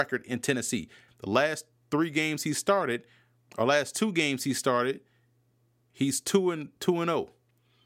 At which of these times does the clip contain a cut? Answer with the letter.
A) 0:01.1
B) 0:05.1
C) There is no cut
A